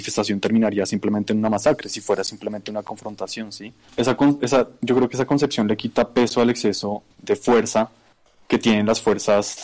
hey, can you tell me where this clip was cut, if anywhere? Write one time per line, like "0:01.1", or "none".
0:03.9
0:07.1